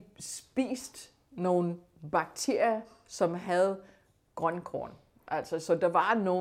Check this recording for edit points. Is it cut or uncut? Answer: uncut